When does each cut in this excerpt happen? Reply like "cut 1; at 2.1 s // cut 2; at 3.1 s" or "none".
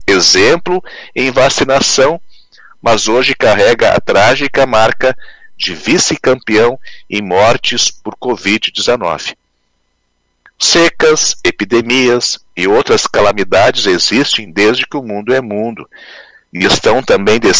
none